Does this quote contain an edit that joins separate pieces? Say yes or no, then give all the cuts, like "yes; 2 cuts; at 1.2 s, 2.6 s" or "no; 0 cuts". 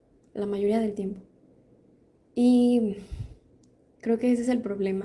yes; 1 cut; at 2.2 s